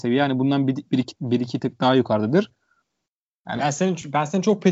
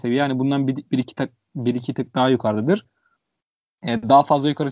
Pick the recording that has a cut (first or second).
first